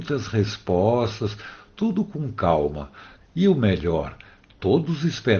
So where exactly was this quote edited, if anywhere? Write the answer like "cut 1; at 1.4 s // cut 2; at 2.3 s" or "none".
cut 1; at 3.2 s